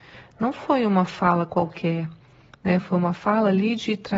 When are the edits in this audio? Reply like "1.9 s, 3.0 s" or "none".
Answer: none